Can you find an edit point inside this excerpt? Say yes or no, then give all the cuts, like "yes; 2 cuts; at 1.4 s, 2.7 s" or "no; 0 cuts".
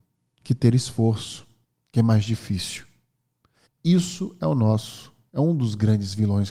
yes; 1 cut; at 3.7 s